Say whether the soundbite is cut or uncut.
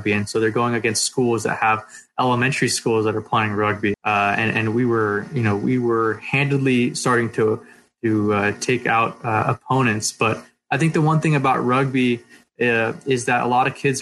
cut